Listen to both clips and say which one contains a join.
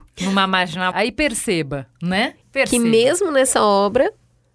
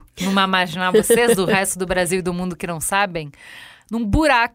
first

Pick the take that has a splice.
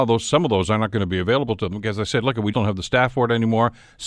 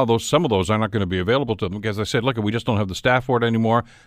first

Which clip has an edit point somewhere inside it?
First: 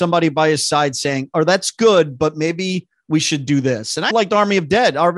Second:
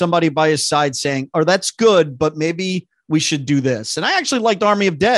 first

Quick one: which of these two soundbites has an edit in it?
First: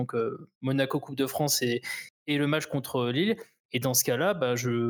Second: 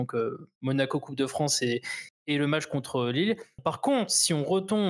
second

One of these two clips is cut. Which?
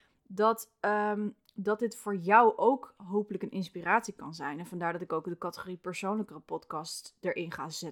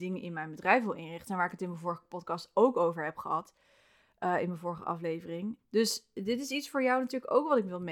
second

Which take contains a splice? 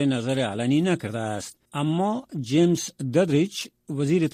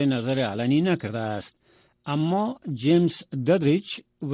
first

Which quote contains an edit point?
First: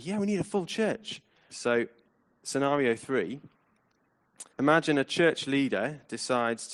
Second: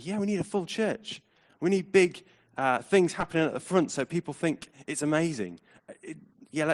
first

